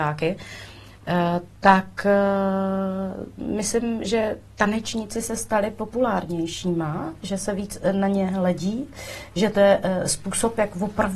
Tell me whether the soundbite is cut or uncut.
uncut